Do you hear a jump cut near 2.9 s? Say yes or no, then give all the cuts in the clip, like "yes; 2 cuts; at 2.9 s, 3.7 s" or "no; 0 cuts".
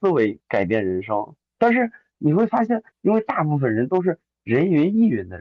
yes; 1 cut; at 2.9 s